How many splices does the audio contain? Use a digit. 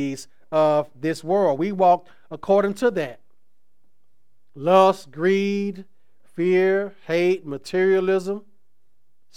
0